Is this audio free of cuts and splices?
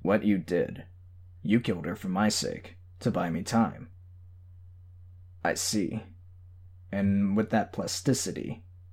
no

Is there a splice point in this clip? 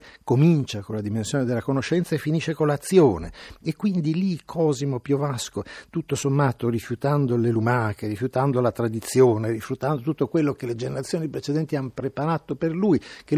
no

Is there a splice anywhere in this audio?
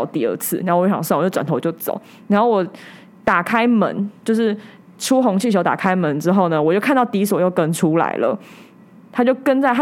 no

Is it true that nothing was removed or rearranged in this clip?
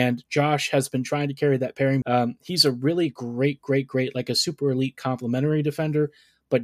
no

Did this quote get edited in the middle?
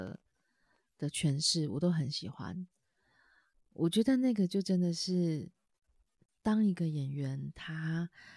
no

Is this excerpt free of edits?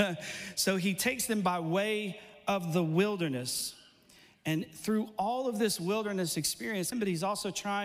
no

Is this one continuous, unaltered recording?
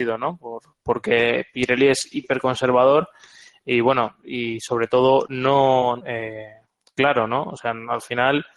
no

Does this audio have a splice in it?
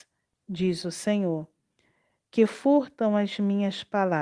no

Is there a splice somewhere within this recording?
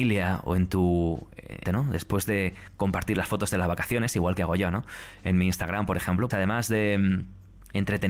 yes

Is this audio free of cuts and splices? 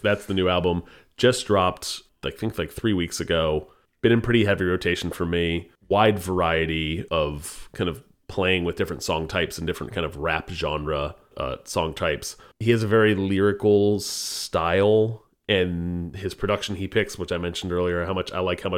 no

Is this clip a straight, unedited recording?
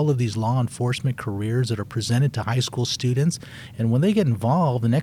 yes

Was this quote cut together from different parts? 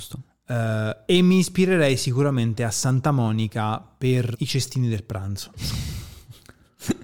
yes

